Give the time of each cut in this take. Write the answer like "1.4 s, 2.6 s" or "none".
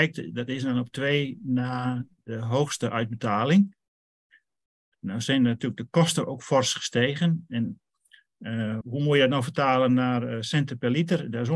8.8 s